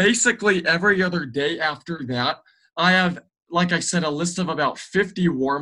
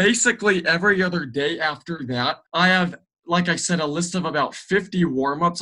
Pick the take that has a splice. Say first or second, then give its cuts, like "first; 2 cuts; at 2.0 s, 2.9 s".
second; 1 cut; at 2.5 s